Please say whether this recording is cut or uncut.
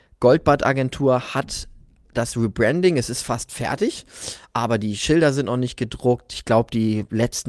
uncut